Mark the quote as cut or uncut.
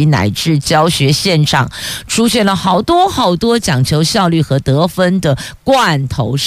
uncut